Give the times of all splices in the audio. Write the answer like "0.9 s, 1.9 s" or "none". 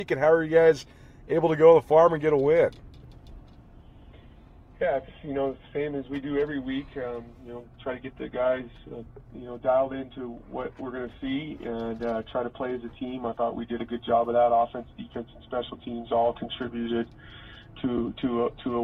9.2 s